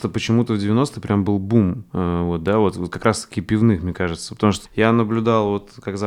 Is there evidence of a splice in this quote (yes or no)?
yes